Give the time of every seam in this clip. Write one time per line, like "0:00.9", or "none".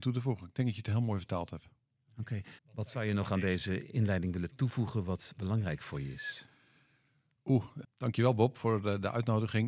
0:02.6
0:07.8